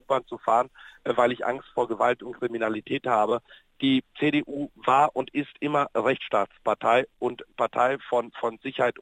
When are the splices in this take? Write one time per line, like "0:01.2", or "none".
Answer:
none